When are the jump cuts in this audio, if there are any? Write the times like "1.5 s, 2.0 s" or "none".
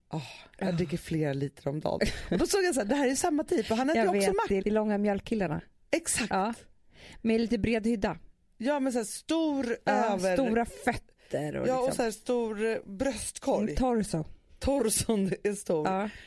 4.6 s